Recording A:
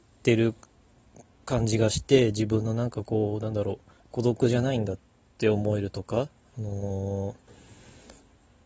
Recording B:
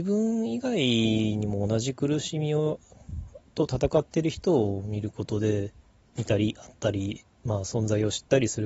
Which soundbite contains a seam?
A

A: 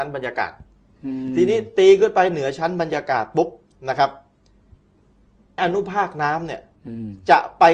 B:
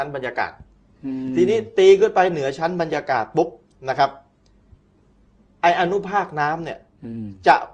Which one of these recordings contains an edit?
A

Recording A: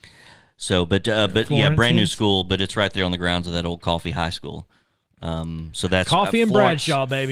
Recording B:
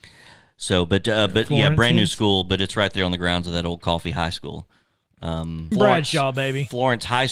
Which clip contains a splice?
B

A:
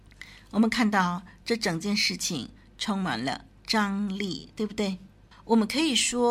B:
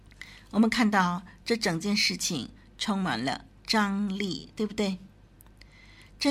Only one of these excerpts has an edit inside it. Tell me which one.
A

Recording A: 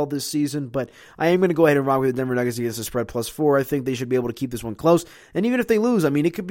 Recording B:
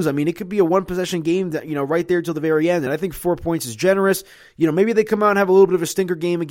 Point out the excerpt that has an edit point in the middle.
B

